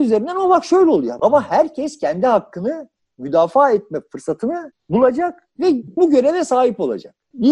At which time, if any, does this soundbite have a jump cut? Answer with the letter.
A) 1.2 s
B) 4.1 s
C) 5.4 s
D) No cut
A